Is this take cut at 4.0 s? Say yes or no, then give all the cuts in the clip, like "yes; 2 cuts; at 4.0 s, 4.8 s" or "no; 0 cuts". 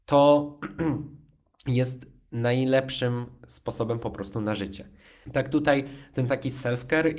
no; 1 cut; at 5.2 s